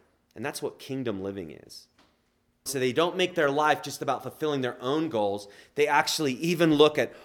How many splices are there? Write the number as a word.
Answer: one